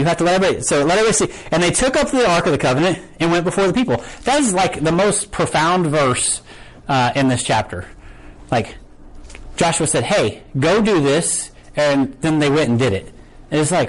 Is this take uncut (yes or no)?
yes